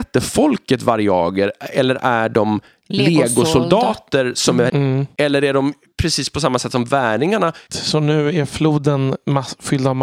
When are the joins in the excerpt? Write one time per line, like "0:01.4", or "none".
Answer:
0:04.7
0:07.7